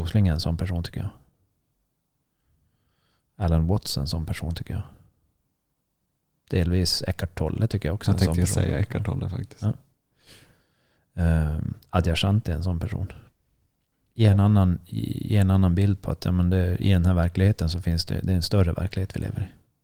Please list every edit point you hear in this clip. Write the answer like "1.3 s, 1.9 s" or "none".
none